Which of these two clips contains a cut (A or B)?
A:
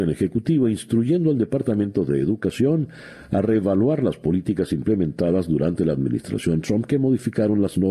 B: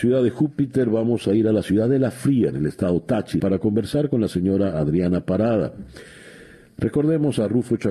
B